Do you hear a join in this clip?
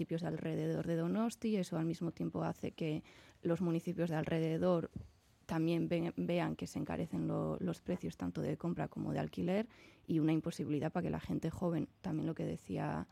no; 0 cuts

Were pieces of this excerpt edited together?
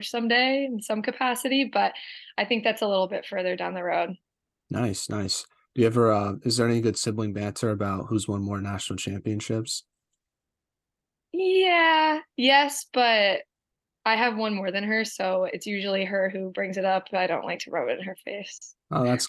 no; 0 cuts

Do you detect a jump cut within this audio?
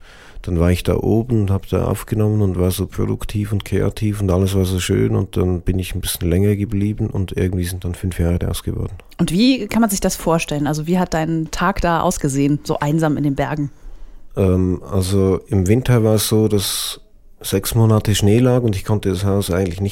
no; 0 cuts

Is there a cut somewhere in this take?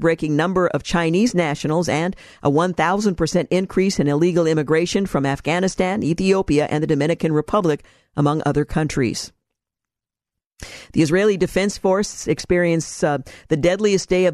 no; 0 cuts

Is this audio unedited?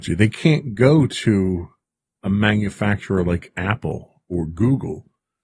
yes; 0 cuts

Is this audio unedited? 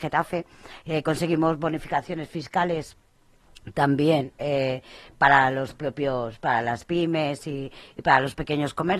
yes; 0 cuts

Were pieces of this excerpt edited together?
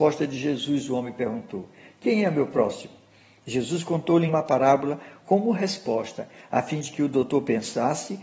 yes; 1 cut; at 4.3 s

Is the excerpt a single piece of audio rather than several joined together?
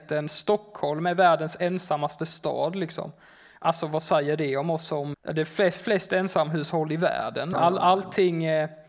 no; 2 cuts; at 5.1 s, 7.5 s

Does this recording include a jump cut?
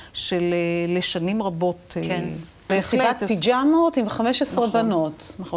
yes; 1 cut; at 2.7 s

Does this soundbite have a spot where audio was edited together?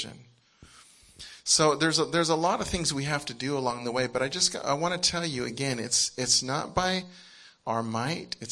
no; 0 cuts

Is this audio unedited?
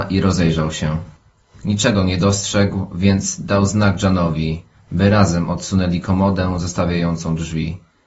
yes; 0 cuts

